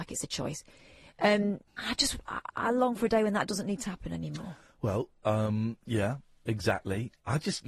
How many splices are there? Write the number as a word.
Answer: one